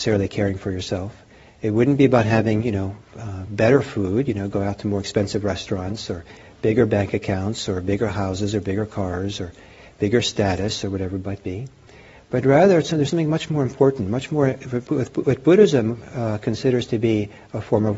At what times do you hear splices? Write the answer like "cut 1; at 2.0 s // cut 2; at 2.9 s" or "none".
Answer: none